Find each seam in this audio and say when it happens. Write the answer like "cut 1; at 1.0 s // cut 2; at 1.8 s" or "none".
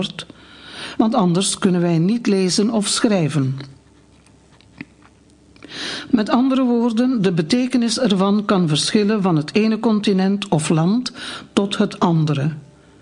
cut 1; at 1.0 s // cut 2; at 6.1 s